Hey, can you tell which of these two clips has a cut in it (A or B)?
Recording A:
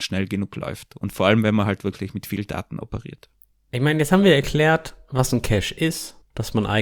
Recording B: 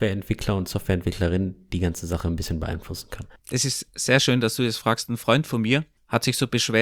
B